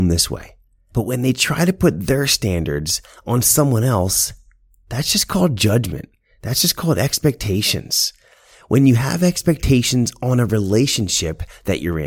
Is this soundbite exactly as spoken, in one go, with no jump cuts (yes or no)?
no